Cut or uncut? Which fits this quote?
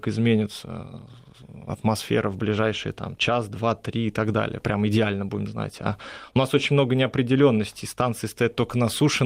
uncut